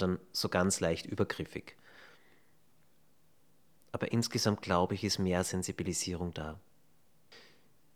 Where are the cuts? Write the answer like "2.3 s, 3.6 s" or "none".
none